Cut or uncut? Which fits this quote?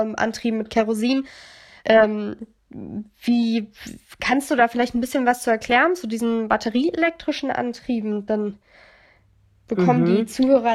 cut